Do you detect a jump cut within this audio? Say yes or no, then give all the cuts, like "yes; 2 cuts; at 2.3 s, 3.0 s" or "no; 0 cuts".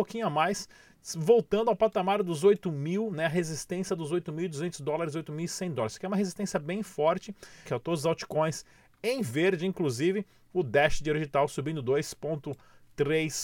yes; 1 cut; at 7.6 s